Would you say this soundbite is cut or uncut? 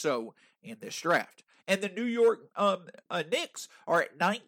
cut